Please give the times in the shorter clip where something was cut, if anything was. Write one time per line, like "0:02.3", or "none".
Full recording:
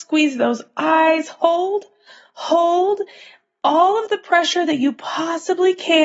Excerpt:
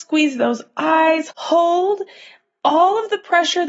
0:01.3

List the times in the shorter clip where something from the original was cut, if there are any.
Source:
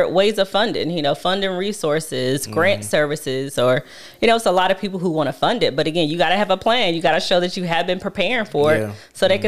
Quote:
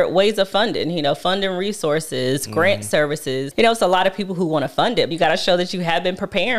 0:03.5
0:05.1

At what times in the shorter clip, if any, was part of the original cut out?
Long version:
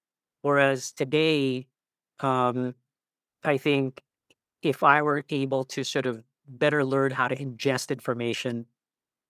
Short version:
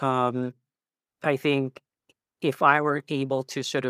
none

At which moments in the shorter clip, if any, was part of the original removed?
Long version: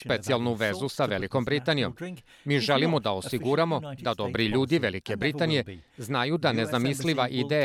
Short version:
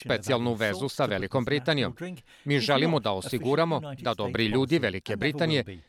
none

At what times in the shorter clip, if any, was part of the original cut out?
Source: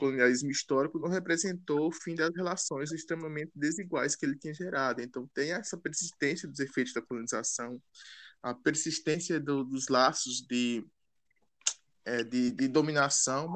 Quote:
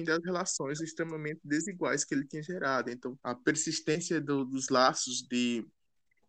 0:03.2

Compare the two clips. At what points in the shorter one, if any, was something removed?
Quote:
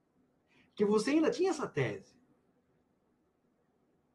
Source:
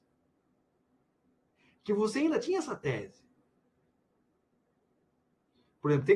none

